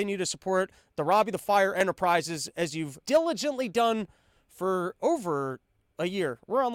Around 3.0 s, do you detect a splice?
yes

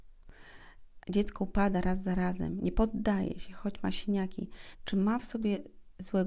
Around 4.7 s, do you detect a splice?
yes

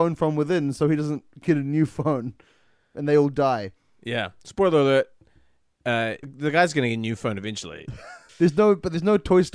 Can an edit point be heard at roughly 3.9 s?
no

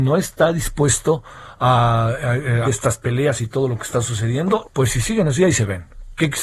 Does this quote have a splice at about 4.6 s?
yes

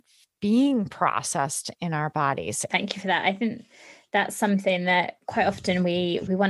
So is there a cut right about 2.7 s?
yes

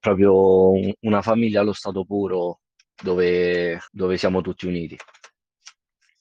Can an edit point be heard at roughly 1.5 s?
no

